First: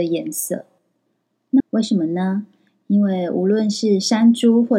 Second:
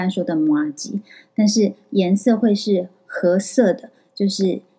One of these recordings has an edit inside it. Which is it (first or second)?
first